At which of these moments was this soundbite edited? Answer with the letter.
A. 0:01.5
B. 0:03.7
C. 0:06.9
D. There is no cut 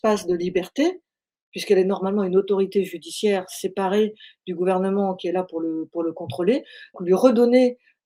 C